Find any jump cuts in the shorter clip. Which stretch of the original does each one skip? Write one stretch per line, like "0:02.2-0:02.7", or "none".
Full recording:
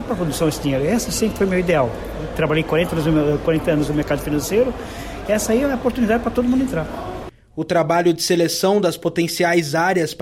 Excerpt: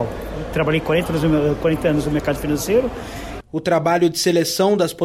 0:05.2-0:07.4

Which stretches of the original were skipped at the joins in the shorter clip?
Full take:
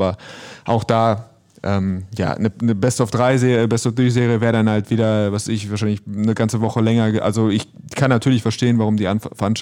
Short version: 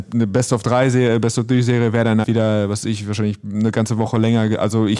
0:04.7-0:04.9

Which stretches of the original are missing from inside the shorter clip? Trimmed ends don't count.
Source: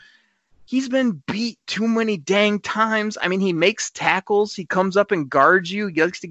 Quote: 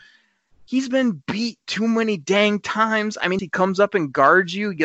0:03.4-0:04.6

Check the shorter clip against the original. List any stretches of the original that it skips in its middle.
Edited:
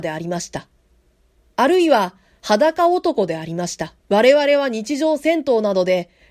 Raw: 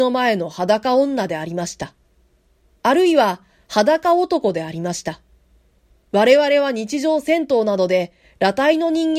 0:05.3-0:06.0

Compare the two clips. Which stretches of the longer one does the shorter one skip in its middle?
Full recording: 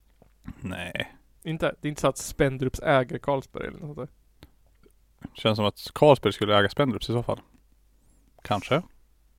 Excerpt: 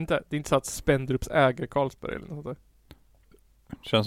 none

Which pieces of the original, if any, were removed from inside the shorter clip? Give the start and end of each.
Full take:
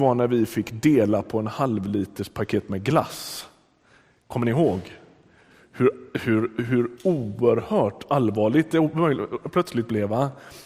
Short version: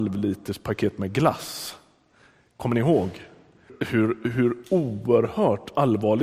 0:05.4-0:06.0

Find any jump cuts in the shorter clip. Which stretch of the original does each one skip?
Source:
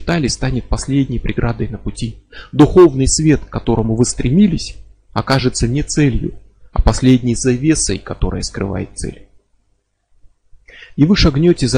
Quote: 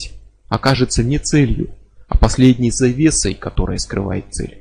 none

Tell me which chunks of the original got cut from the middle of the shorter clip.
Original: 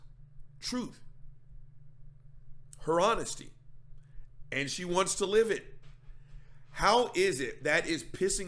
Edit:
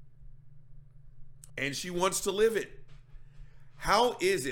0:02.8-0:04.4

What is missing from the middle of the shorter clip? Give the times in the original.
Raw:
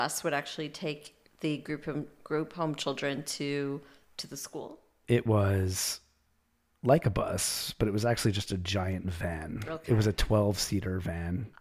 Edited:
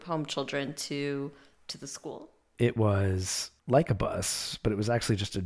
0:06.1-0:06.8

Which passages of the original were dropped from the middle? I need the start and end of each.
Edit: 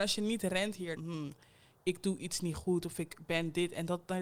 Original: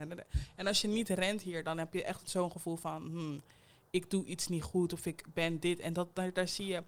0:01.6-0:03.0

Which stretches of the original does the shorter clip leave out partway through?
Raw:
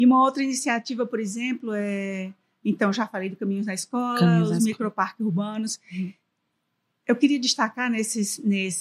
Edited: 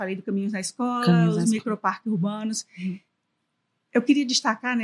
none

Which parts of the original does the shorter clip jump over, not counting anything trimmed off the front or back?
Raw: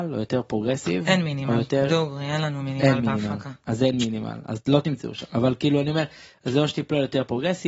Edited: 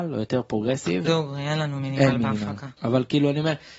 0:01.0-0:01.9
0:03.6-0:05.3

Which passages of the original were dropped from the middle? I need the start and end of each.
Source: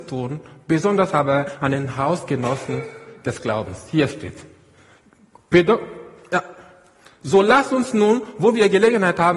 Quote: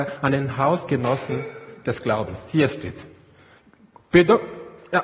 none

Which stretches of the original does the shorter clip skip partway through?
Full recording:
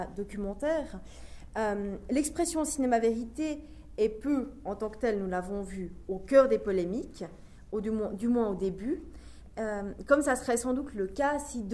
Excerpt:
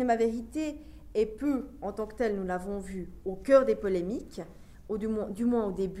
none

